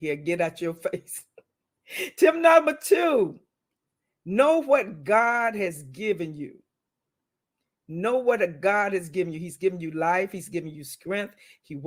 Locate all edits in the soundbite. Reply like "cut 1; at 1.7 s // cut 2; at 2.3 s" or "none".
none